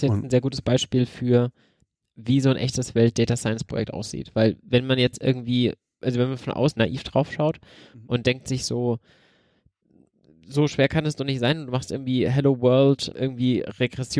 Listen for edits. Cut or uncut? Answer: uncut